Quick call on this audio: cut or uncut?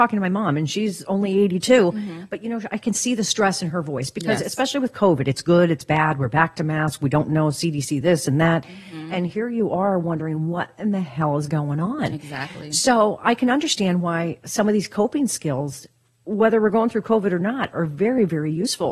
uncut